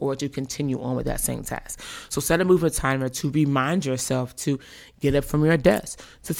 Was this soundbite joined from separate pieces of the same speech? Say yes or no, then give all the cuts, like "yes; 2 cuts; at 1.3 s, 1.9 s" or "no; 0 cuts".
no; 0 cuts